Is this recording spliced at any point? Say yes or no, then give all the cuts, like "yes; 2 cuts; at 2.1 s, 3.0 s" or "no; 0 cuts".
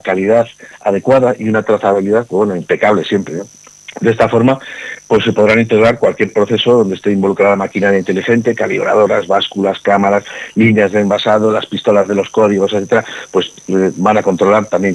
no; 0 cuts